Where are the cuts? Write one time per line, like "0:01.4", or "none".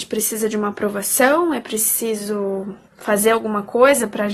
0:02.9